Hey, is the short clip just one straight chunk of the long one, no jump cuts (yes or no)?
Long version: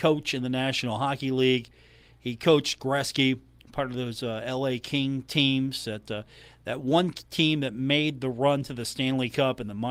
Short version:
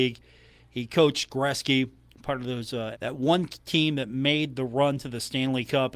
no